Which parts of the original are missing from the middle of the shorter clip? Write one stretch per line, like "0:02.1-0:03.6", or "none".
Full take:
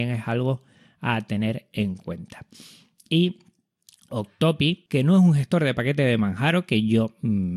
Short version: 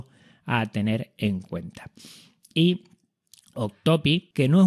none